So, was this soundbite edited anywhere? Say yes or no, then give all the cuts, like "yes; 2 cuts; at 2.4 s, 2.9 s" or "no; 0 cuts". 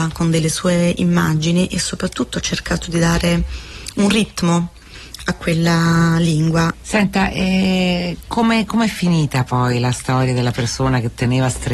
yes; 1 cut; at 6.7 s